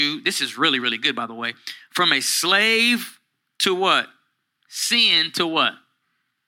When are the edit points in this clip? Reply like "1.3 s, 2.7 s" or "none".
none